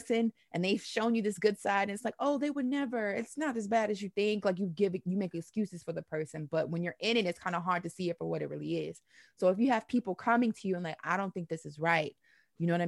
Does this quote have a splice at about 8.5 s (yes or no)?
no